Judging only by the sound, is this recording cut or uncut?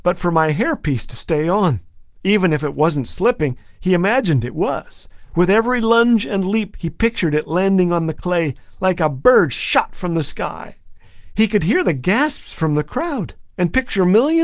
uncut